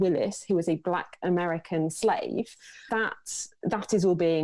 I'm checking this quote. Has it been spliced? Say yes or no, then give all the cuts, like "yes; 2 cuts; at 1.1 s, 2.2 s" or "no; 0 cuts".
yes; 1 cut; at 2.9 s